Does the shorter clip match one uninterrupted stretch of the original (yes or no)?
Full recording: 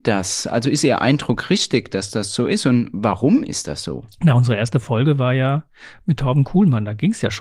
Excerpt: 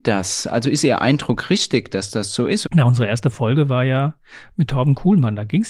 no